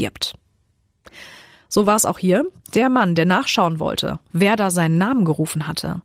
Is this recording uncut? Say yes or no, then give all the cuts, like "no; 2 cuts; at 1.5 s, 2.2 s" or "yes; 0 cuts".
yes; 0 cuts